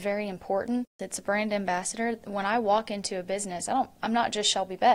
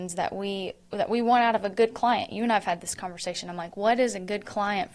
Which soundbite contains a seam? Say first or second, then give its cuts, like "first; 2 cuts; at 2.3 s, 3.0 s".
first; 1 cut; at 1.0 s